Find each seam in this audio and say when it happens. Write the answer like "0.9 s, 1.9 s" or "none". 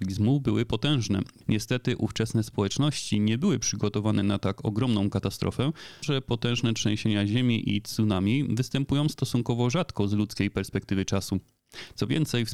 1.4 s, 6.0 s